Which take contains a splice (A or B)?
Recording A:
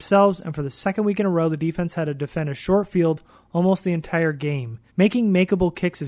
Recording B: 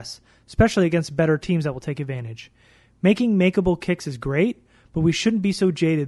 A